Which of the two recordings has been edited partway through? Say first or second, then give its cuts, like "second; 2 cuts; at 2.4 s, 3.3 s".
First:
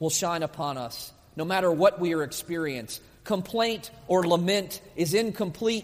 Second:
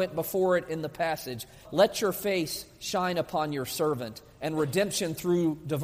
second; 1 cut; at 1.6 s